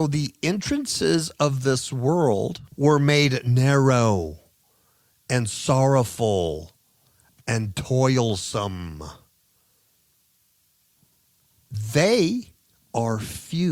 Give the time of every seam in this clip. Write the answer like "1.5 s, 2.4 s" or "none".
2.7 s